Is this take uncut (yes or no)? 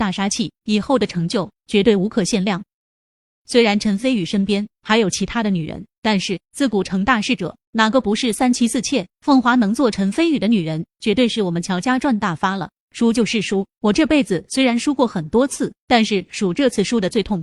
no